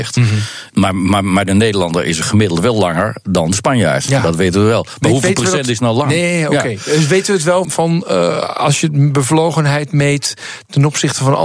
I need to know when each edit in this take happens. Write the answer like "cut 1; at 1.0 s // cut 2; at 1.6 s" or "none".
cut 1; at 7.6 s